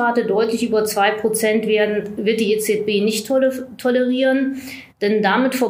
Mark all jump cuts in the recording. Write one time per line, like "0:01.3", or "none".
none